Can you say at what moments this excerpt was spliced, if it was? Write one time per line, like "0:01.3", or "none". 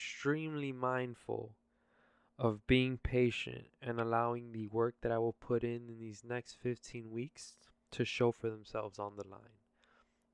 none